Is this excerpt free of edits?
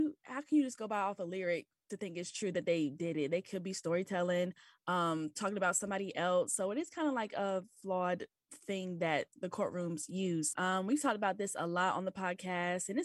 no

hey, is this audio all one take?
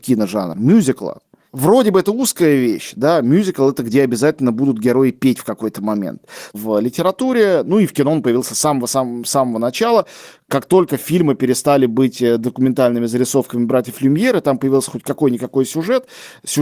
no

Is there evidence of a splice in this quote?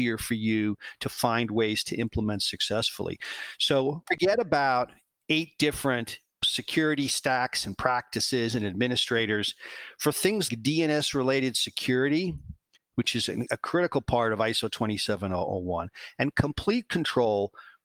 yes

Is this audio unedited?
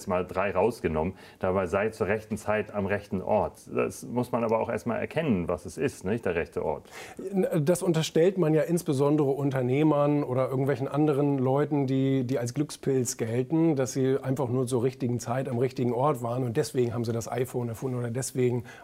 yes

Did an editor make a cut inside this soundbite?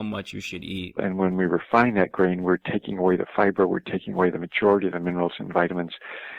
yes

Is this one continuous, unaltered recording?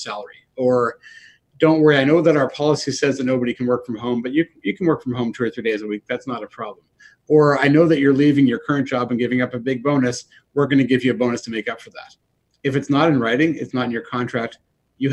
yes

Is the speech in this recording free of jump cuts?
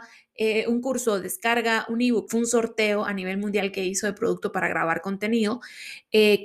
no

